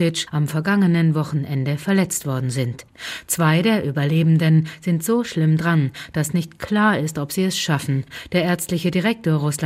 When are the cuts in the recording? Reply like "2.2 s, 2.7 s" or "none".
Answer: none